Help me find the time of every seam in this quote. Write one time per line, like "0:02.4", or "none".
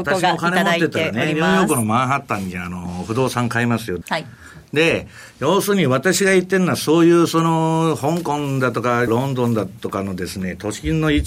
0:04.0
0:09.1